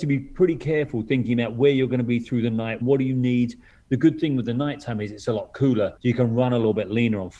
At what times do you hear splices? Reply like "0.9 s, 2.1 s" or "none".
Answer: 2.8 s, 6.0 s